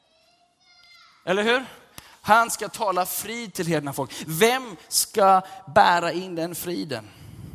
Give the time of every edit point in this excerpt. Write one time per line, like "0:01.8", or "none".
none